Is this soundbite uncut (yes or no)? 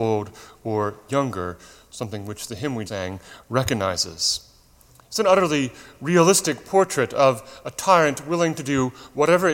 no